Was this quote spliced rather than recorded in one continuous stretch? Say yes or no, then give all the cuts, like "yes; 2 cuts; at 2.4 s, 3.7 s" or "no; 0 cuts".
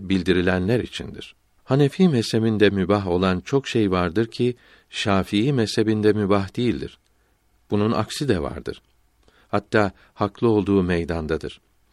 yes; 2 cuts; at 1.6 s, 9.4 s